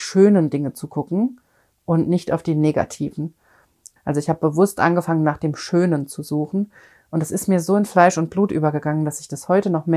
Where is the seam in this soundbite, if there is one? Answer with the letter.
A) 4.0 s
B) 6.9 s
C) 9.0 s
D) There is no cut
A